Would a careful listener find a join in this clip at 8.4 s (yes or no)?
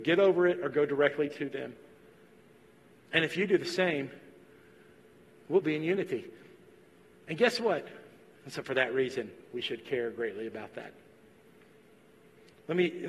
yes